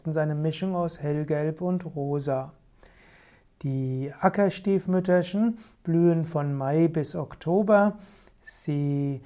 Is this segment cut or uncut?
uncut